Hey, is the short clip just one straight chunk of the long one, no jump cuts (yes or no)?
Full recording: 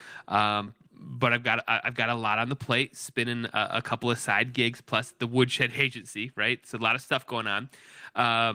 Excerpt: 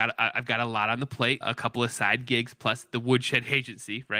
no